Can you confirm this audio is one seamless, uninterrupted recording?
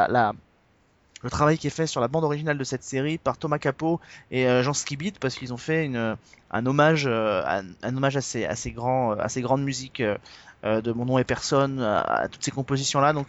yes; 0 cuts

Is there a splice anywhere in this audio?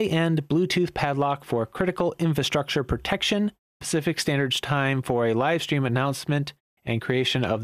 yes; 1 cut; at 3.8 s

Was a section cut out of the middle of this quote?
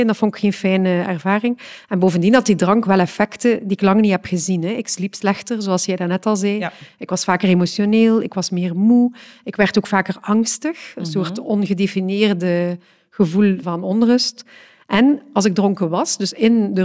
yes; 1 cut; at 13.6 s

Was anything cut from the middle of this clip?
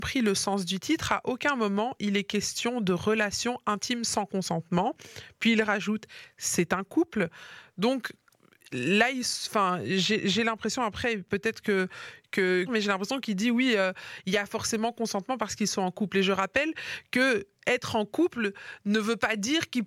yes; 1 cut; at 12.7 s

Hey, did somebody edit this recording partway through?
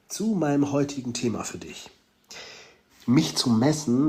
yes; 1 cut; at 2.9 s

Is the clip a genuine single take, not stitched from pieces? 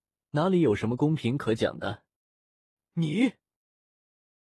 yes; 0 cuts

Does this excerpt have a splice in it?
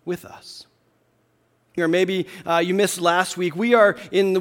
yes; 1 cut; at 1.8 s

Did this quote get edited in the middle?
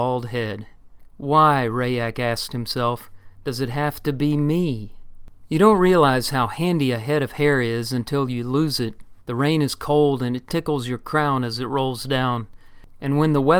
yes; 1 cut; at 9.2 s

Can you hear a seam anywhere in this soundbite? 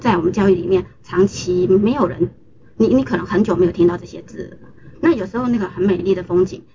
yes; 1 cut; at 4.9 s

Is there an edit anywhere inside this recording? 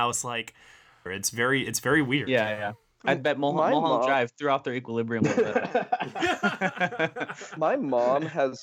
yes; 1 cut; at 1.1 s

